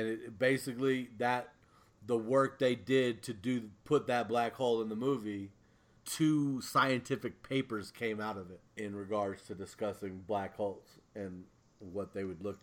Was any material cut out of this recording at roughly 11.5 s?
no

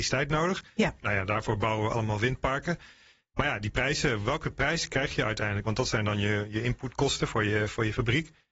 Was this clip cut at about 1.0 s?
no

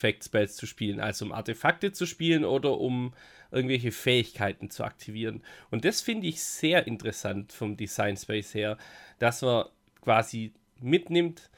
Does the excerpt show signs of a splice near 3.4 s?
no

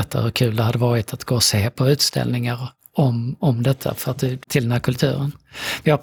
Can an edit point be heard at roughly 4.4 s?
yes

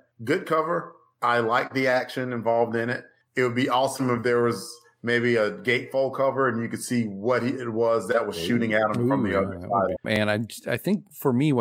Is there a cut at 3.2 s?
no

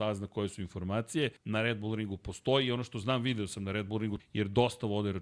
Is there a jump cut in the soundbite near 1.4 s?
yes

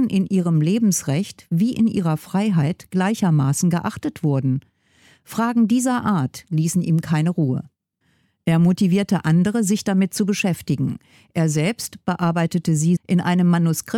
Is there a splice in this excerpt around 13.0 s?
yes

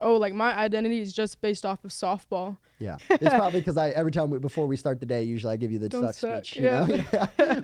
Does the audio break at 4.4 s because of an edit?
no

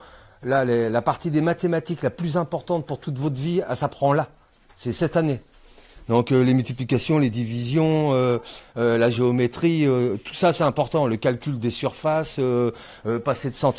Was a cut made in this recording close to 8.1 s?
no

